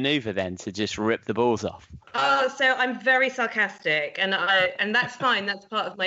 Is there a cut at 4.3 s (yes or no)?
no